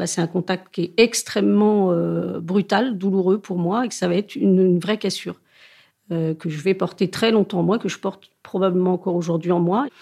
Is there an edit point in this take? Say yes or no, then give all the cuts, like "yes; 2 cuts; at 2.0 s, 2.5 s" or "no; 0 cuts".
no; 0 cuts